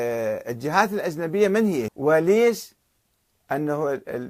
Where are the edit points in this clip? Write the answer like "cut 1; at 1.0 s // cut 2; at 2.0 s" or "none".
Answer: cut 1; at 1.9 s